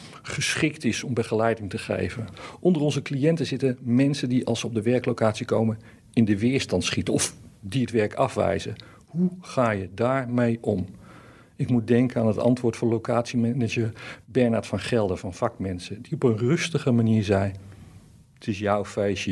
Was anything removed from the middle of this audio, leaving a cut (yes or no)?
no